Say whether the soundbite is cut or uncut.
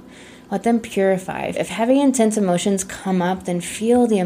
cut